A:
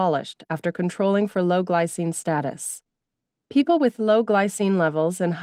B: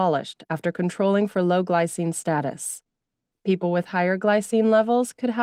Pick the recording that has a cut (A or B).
B